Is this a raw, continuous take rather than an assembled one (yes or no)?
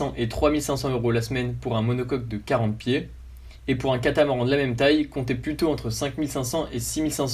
yes